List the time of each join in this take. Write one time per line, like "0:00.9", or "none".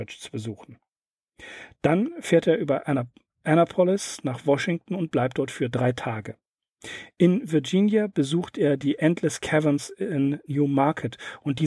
none